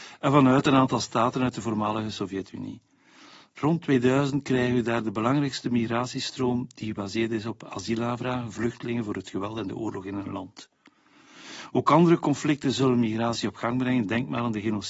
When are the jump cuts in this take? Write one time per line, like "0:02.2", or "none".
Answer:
none